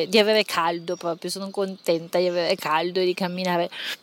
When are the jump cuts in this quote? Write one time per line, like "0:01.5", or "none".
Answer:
none